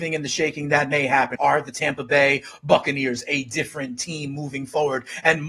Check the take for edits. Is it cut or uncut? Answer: cut